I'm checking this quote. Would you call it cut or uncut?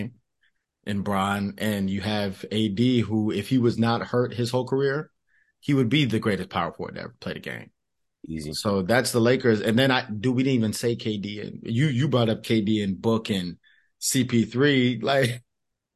uncut